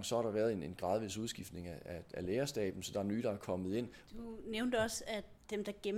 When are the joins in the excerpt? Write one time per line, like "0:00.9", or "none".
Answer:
0:04.1